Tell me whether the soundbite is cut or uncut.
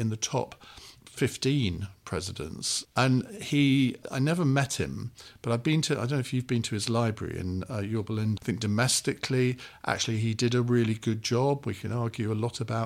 cut